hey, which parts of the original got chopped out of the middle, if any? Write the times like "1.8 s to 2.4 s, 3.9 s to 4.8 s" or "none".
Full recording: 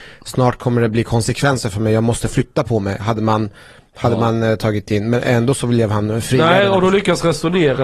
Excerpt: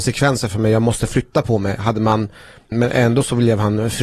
3.9 s to 5.0 s